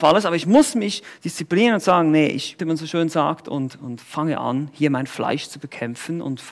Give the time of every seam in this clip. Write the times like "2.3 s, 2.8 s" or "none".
2.6 s